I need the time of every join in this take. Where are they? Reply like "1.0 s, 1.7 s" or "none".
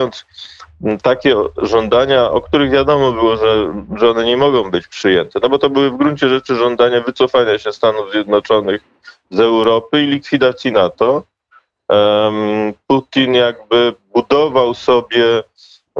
none